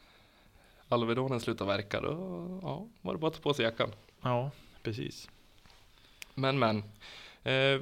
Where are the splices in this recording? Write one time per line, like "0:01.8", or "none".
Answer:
none